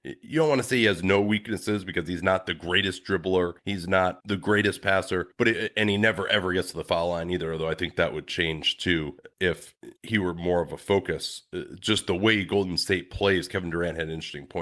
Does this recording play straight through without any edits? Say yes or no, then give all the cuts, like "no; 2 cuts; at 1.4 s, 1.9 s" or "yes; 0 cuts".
yes; 0 cuts